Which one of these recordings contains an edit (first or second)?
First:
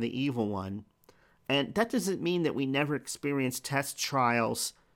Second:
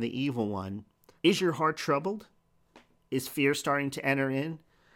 second